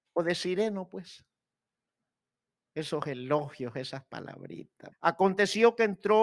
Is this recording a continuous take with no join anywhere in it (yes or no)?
no